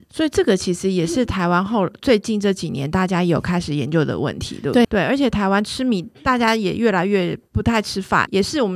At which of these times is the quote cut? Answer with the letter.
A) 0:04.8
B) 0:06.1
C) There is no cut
A